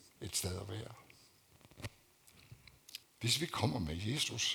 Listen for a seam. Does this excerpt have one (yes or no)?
yes